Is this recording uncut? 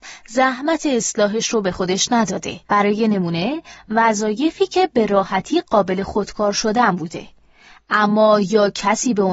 no; 1 cut; at 2.6 s

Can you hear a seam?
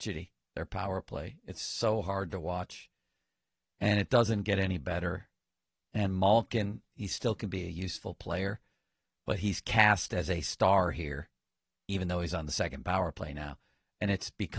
yes; 1 cut; at 6.9 s

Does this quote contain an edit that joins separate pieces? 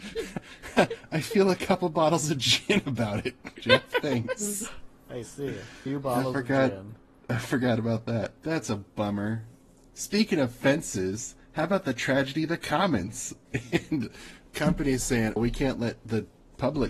yes; 1 cut; at 15.4 s

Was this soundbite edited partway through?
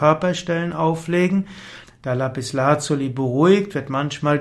yes; 1 cut; at 1.8 s

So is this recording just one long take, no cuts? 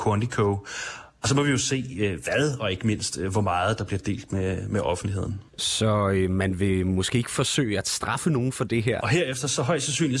no; 2 cuts; at 5.5 s, 9.0 s

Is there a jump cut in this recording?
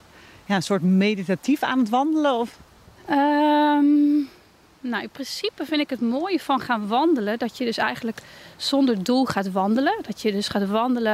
no; 0 cuts

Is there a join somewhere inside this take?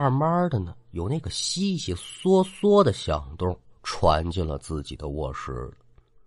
no; 0 cuts

